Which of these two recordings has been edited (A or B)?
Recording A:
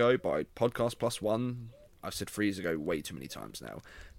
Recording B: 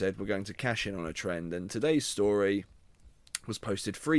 A